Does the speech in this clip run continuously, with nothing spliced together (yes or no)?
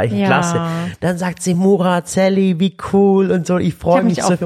yes